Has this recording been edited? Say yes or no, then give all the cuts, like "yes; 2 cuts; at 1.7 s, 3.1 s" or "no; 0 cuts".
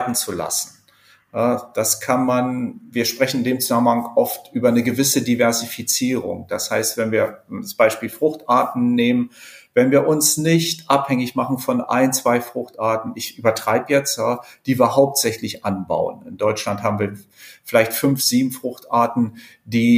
no; 0 cuts